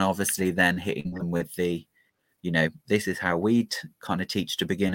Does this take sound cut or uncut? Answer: uncut